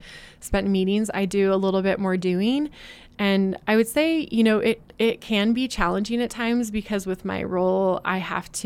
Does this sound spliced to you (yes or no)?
no